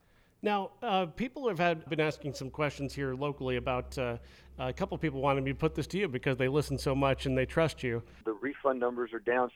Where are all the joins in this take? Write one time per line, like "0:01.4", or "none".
0:01.9
0:08.2